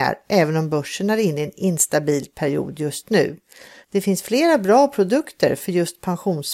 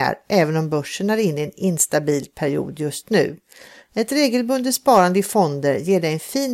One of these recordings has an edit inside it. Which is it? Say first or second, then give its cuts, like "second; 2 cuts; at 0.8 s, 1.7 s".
first; 1 cut; at 3.8 s